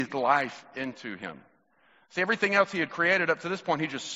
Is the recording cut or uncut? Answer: uncut